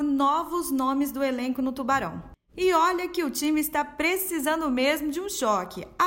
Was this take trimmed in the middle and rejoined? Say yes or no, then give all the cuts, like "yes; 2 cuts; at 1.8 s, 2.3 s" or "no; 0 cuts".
no; 0 cuts